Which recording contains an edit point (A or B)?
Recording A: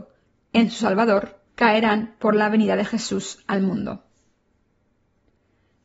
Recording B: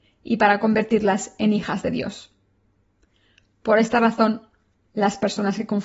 A